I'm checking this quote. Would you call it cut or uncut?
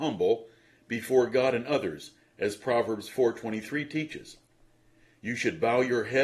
uncut